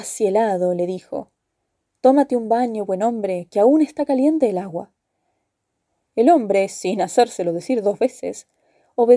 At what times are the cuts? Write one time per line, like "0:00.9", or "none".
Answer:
none